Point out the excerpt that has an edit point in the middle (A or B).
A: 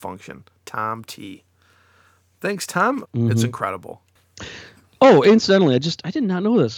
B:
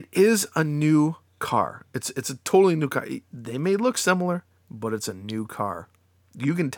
A